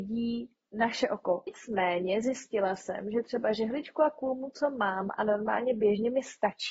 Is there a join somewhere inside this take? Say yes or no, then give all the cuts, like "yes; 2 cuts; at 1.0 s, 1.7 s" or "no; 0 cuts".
yes; 1 cut; at 1.5 s